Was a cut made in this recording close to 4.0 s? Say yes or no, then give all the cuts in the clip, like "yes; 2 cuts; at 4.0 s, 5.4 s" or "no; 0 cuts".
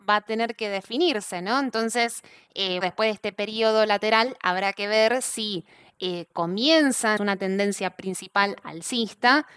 no; 2 cuts; at 2.8 s, 7.2 s